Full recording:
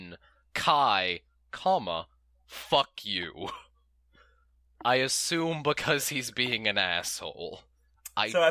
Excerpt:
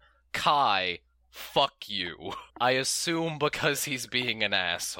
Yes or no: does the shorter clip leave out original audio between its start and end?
yes